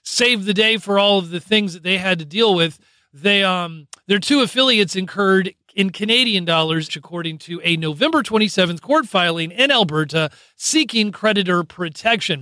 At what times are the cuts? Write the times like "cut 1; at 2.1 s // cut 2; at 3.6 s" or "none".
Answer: cut 1; at 6.9 s